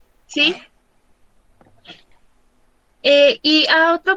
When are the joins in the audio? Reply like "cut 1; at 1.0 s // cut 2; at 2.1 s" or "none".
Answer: cut 1; at 2.9 s